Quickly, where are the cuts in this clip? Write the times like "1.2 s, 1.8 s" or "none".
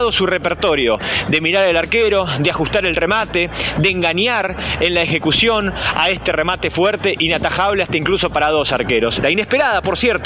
9.2 s